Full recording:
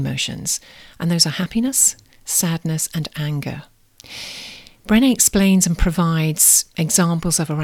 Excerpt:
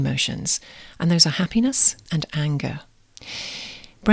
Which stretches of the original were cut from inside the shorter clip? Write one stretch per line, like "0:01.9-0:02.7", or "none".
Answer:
0:02.1-0:02.9